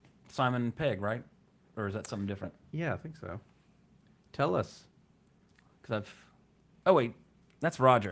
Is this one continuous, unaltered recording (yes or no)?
yes